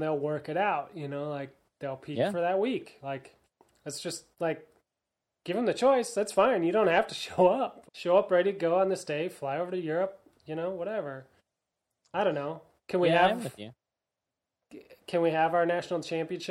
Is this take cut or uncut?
cut